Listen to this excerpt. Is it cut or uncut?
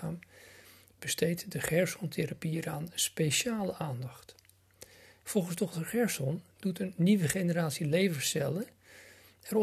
cut